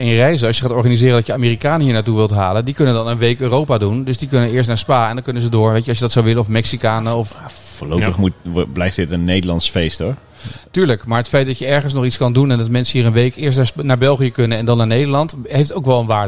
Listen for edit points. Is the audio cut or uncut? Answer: uncut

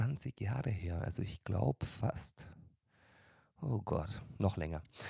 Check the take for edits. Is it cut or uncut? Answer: uncut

